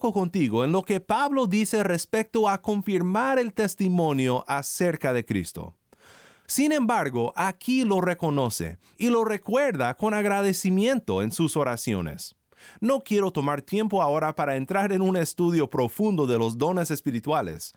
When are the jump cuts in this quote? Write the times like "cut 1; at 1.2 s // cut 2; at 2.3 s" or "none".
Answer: cut 1; at 6.4 s

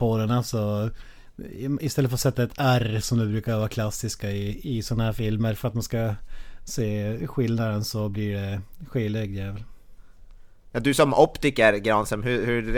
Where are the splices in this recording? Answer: none

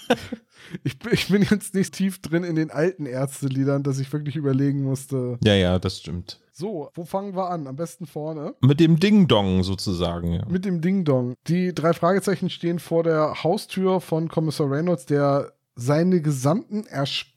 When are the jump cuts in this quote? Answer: cut 1; at 1.9 s

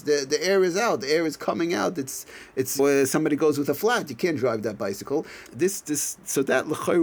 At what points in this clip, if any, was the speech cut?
cut 1; at 2.8 s // cut 2; at 5.5 s

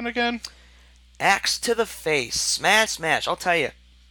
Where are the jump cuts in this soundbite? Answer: cut 1; at 2.9 s

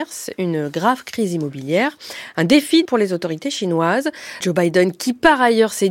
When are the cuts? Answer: cut 1; at 2.8 s // cut 2; at 4.4 s

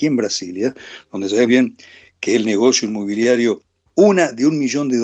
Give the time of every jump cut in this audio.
cut 1; at 1.5 s // cut 2; at 3.9 s

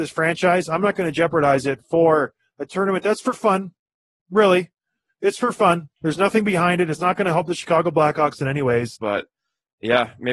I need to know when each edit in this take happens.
cut 1; at 5.9 s // cut 2; at 9.0 s

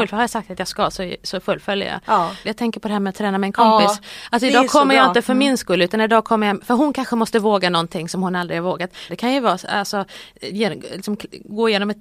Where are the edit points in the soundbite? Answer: cut 1; at 2.4 s // cut 2; at 9.1 s

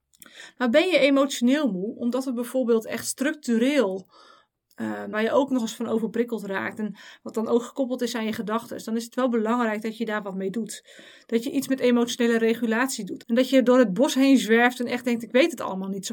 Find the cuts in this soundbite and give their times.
cut 1; at 5.1 s // cut 2; at 13.2 s

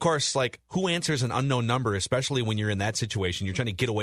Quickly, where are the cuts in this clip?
none

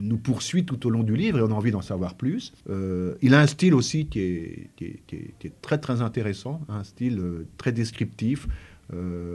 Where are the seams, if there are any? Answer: cut 1; at 2.6 s

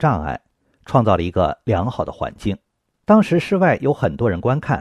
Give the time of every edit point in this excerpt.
cut 1; at 2.9 s

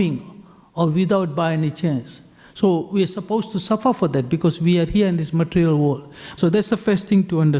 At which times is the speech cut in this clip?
cut 1; at 6.4 s

